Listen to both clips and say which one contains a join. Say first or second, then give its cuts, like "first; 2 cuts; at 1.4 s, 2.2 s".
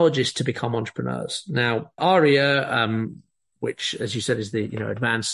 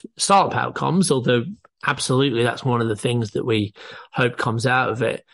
first; 1 cut; at 2.0 s